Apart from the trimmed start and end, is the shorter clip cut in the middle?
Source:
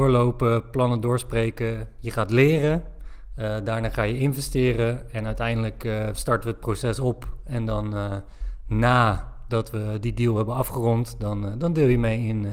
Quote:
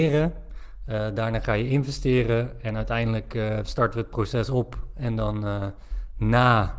no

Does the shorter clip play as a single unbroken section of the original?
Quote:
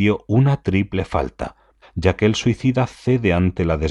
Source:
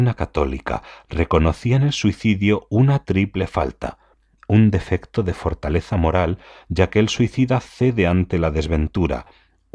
no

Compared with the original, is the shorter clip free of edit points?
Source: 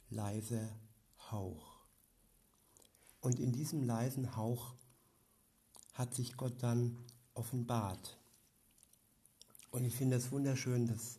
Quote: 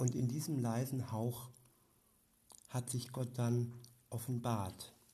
yes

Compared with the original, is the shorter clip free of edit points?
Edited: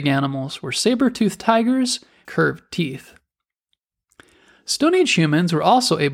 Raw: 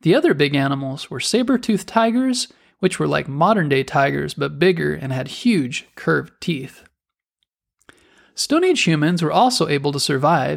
no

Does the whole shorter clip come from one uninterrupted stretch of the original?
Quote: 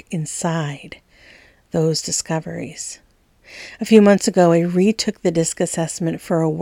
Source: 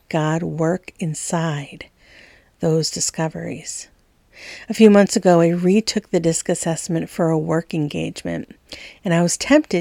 yes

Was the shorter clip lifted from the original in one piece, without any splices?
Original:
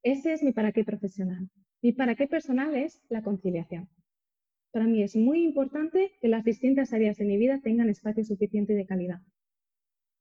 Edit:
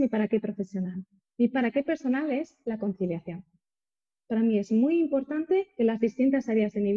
yes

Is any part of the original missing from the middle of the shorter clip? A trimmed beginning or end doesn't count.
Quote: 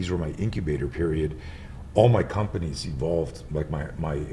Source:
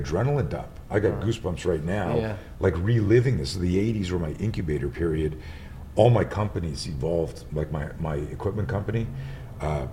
no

